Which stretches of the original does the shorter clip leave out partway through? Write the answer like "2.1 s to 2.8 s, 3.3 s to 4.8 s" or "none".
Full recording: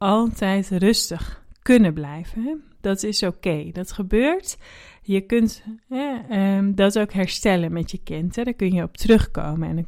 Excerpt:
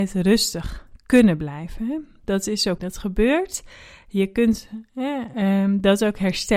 3.3 s to 3.7 s